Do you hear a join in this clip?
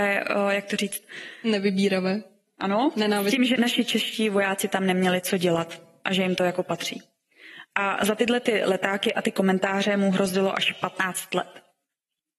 yes; 1 cut; at 3.6 s

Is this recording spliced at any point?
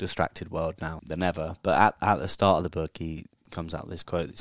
yes; 1 cut; at 1.0 s

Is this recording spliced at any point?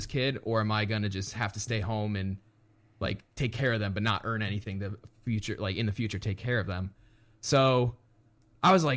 no; 0 cuts

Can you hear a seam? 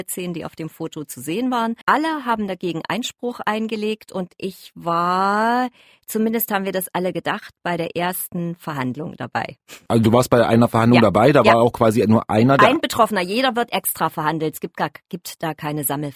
yes; 1 cut; at 1.8 s

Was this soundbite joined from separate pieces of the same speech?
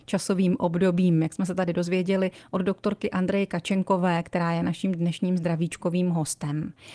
no; 0 cuts

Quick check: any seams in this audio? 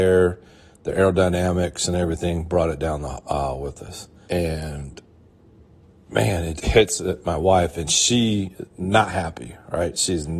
yes; 2 cuts; at 4.2 s, 6.6 s

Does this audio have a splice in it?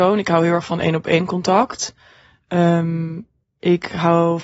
no; 0 cuts

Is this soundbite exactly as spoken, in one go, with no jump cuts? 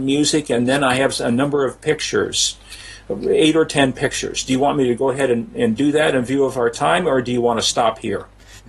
yes; 0 cuts

